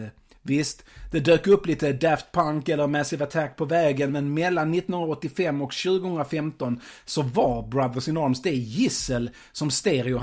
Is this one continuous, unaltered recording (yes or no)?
yes